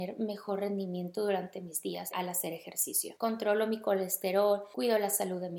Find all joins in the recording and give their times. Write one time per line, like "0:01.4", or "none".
0:02.1
0:03.2

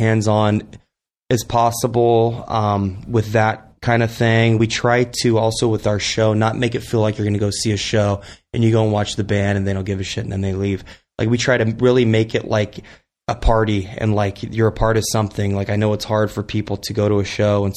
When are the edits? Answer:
none

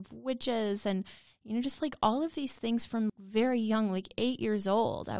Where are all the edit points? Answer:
0:03.1

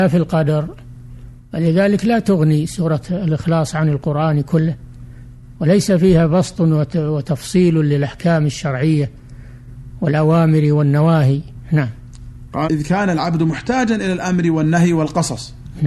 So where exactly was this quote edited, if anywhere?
0:12.7

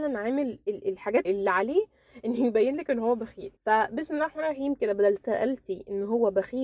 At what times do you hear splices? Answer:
0:01.2
0:03.6

